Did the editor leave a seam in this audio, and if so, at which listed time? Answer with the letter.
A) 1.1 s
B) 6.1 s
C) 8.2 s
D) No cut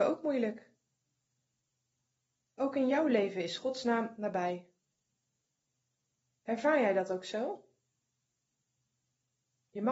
D